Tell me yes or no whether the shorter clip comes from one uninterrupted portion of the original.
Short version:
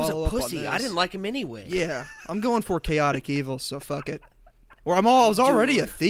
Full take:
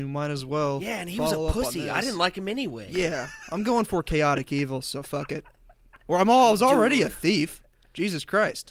yes